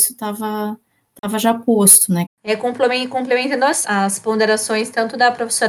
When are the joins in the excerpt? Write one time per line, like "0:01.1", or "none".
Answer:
0:02.2
0:03.8